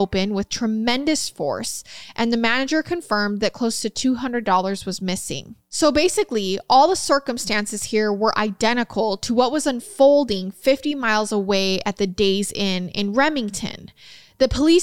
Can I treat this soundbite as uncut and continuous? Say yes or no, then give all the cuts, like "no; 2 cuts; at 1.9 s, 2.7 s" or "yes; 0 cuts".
yes; 0 cuts